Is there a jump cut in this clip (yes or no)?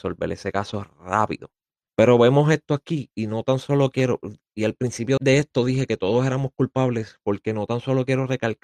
yes